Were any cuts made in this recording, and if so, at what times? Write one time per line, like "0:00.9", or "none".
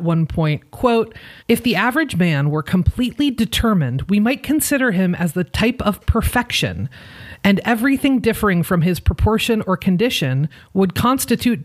0:01.4